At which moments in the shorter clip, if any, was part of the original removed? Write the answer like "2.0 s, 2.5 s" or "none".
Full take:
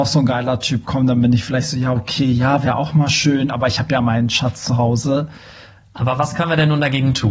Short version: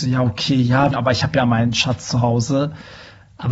0.9 s